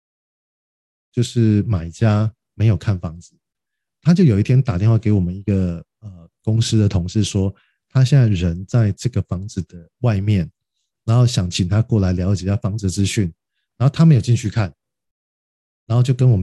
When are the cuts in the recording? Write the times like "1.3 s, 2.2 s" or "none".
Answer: none